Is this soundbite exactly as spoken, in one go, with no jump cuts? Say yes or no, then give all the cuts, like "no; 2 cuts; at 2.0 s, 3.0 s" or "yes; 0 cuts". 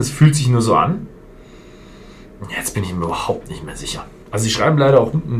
yes; 0 cuts